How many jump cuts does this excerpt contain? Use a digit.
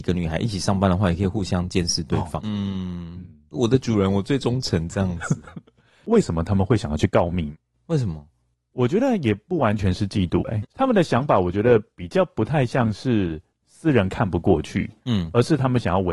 2